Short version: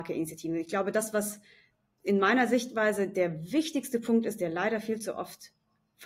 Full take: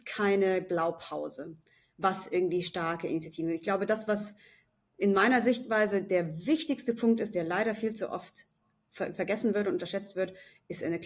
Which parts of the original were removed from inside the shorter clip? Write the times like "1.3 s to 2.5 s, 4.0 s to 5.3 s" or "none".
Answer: none